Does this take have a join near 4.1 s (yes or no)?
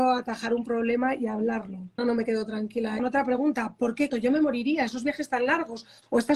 yes